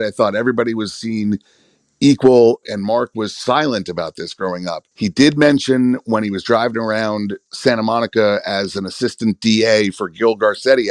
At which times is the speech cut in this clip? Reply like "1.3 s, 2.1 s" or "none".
2.6 s, 4.9 s